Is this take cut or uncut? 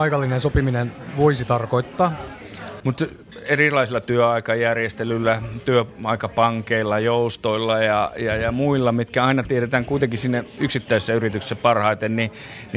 cut